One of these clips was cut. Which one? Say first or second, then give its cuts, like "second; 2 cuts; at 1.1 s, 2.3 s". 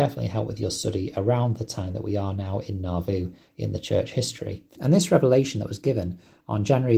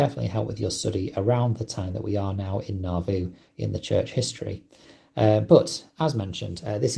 first; 1 cut; at 4.8 s